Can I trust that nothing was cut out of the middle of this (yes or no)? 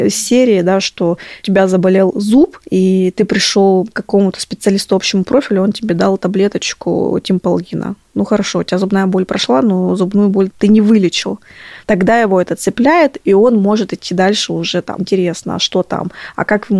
no